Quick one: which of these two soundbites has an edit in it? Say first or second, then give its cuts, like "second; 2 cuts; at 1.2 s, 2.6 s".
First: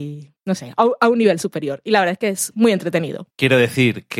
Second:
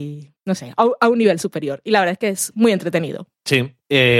first; 1 cut; at 3.3 s